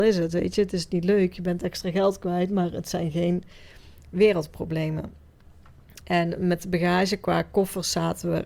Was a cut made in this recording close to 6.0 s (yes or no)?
no